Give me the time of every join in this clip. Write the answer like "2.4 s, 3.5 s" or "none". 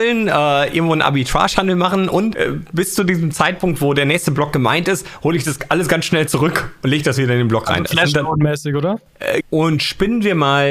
9.4 s